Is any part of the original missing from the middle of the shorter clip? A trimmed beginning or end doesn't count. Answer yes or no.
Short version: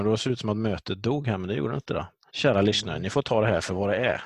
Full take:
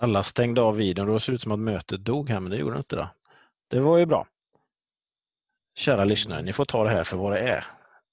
yes